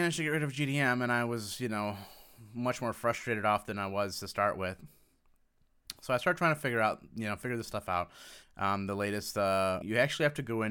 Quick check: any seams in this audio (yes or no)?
yes